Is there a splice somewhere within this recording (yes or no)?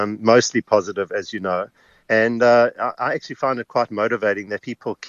no